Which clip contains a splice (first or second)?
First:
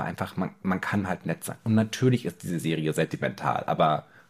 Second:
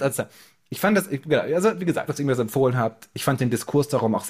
second